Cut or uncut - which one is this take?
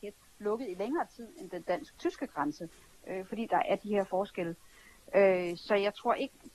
uncut